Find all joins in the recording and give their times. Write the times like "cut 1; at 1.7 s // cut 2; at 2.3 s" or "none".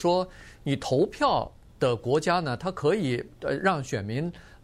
none